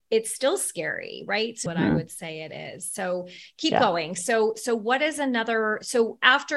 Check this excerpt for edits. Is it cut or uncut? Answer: cut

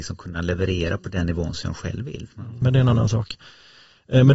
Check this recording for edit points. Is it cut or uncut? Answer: cut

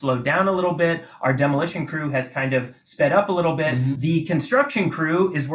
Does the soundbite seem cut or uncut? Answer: cut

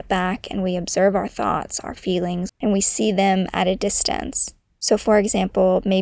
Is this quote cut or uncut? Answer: cut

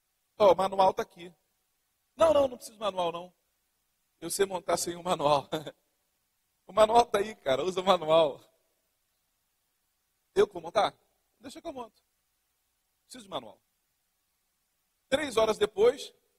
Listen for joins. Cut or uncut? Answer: uncut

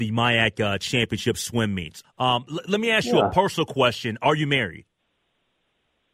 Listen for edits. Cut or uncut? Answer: cut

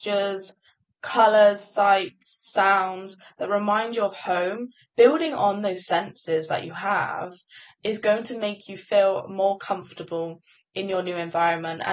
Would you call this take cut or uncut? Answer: uncut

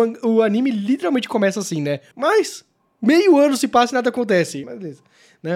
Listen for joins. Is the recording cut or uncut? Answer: cut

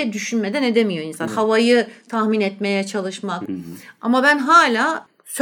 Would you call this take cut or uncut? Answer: cut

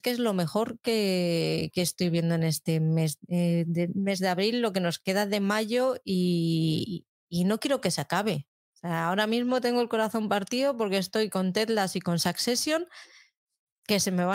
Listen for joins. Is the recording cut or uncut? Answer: uncut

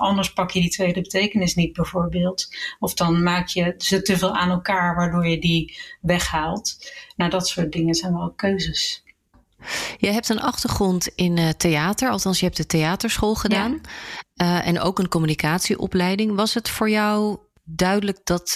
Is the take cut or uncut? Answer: uncut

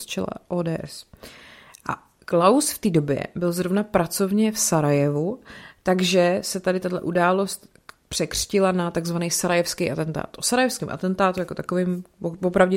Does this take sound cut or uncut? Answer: uncut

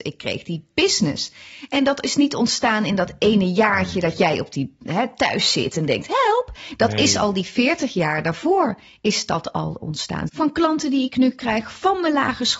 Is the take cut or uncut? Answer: cut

